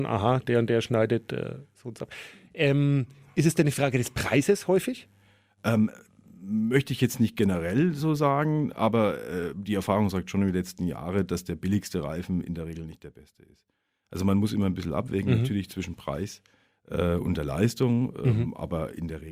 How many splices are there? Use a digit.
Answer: 0